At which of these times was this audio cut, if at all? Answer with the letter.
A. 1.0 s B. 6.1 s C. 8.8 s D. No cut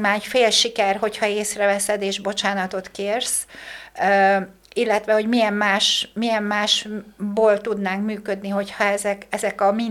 D